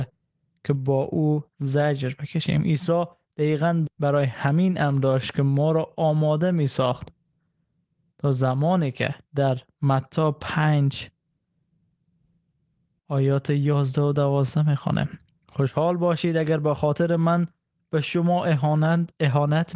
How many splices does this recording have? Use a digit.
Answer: 2